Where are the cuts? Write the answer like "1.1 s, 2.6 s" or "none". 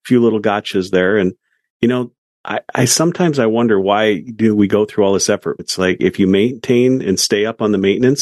5.6 s